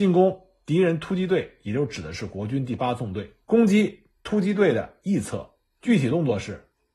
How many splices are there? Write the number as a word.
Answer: one